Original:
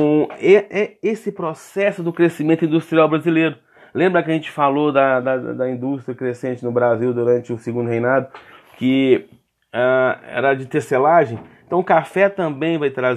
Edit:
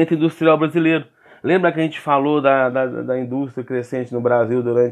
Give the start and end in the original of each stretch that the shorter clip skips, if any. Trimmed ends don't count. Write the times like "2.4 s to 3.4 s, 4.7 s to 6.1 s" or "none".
none